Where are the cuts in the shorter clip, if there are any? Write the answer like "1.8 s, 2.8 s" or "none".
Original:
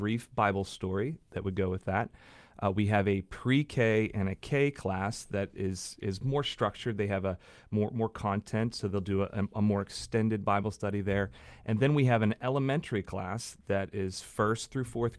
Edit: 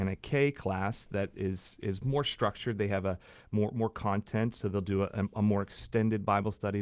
none